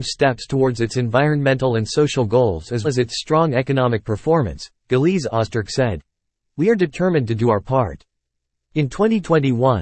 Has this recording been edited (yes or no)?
yes